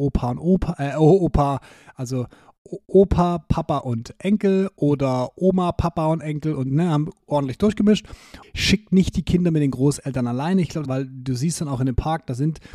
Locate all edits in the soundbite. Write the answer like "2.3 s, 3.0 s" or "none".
8.4 s, 10.8 s